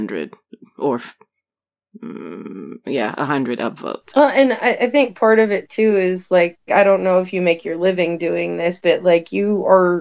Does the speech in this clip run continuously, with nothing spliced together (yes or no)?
no